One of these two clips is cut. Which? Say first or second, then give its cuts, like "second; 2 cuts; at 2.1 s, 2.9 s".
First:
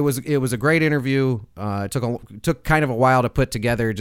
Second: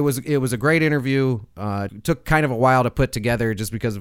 second; 1 cut; at 1.9 s